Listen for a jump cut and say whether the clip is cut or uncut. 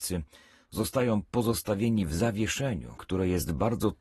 cut